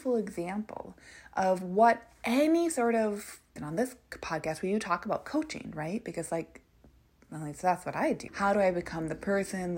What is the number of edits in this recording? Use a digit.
2